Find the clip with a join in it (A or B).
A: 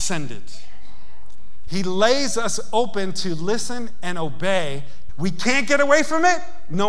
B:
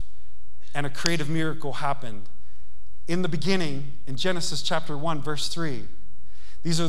A